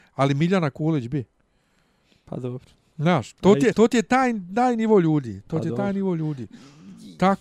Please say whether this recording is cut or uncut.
cut